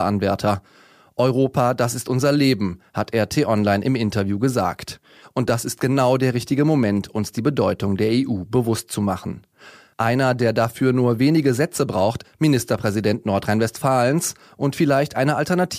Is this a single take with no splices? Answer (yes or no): no